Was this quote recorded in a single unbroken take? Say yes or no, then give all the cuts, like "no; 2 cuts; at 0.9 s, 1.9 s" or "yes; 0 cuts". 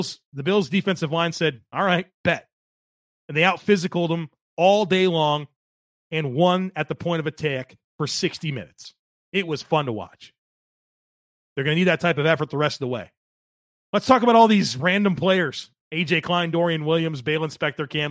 no; 1 cut; at 13.9 s